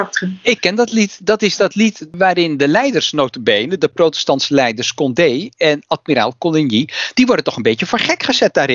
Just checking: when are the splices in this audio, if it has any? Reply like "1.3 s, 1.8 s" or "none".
none